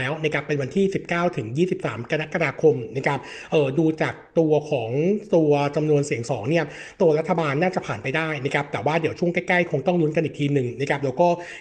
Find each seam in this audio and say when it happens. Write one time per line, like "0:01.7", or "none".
0:06.3